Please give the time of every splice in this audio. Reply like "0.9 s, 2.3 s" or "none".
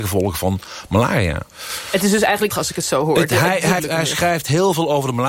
2.5 s, 3.8 s